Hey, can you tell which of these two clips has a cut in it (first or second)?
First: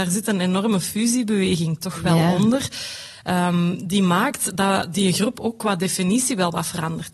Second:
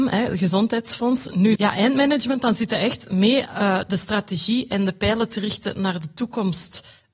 second